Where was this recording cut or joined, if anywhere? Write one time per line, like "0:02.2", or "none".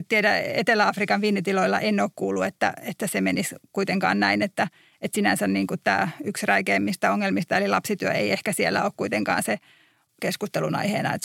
none